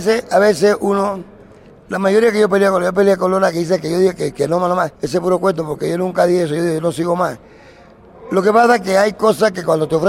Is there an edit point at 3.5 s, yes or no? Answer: no